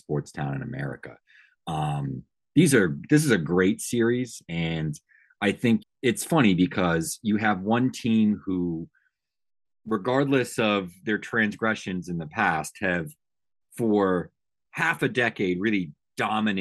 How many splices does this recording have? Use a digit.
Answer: 1